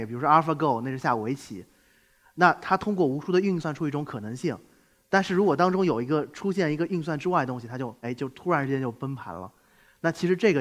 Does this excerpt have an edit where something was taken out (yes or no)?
yes